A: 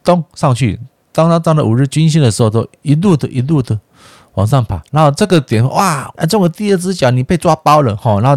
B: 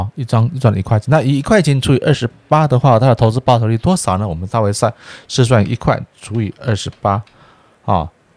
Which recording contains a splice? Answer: A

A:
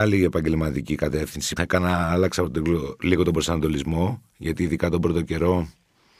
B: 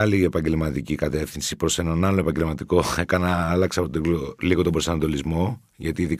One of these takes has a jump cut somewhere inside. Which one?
A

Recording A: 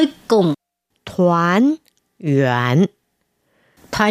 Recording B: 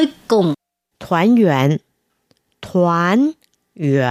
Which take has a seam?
A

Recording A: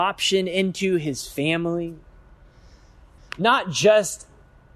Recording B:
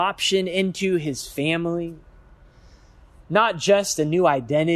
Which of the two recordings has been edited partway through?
A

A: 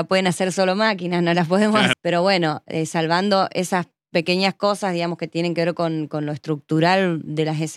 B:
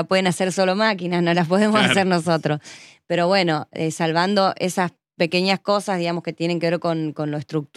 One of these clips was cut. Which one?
A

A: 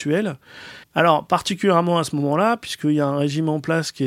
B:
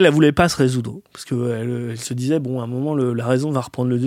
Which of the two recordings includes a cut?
A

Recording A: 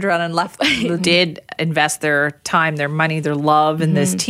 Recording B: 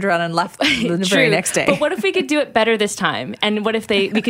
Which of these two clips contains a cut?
A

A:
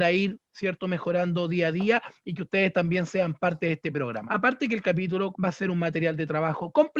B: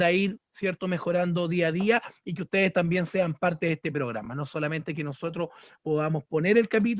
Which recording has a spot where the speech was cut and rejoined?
A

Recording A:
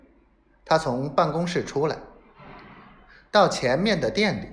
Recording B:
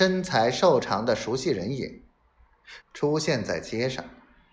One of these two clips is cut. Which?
B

